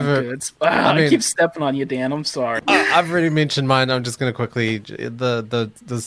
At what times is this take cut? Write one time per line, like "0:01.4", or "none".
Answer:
0:02.6